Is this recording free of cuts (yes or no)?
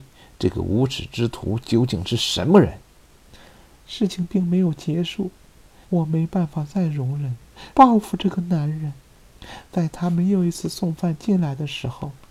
no